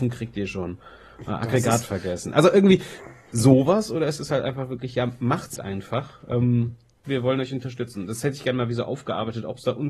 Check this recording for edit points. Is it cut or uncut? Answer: cut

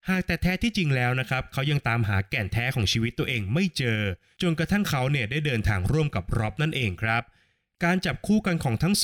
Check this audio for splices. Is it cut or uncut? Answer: uncut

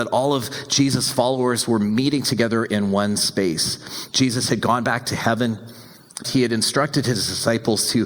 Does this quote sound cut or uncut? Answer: cut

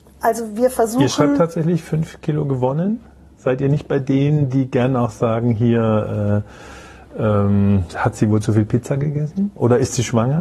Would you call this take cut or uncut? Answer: uncut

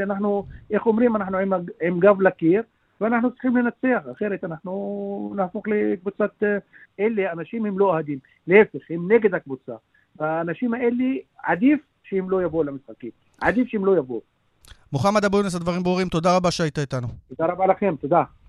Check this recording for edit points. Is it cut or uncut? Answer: cut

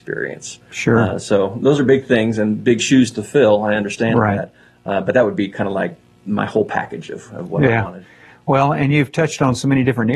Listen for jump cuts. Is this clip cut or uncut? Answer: uncut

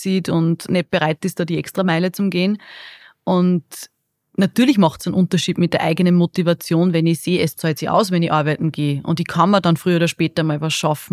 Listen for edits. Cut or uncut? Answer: uncut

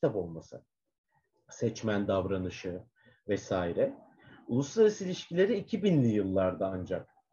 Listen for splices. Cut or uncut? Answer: cut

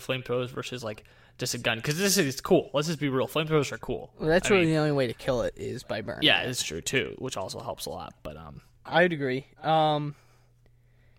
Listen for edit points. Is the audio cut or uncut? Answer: cut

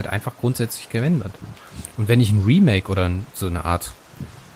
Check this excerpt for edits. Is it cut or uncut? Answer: uncut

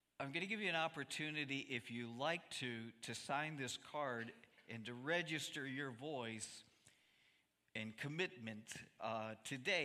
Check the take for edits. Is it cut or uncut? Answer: uncut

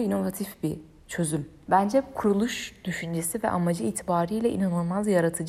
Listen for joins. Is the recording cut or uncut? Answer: cut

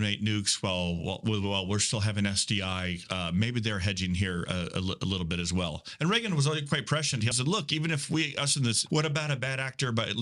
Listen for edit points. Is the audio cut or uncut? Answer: cut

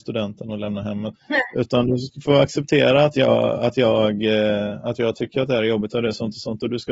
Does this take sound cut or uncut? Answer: cut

